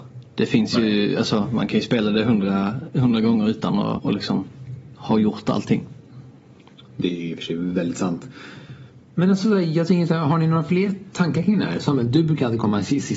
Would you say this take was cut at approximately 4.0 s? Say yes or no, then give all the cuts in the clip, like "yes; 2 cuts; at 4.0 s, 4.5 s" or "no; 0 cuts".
yes; 1 cut; at 4.0 s